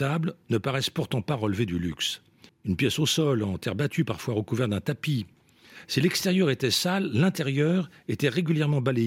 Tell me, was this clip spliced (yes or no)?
yes